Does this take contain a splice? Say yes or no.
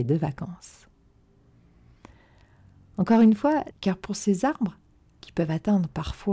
yes